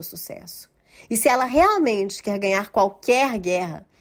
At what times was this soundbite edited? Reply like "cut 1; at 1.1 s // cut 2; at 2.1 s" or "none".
none